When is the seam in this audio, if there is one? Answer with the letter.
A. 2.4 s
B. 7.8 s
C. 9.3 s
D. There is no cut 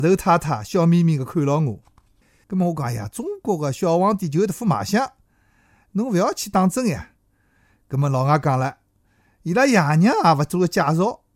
A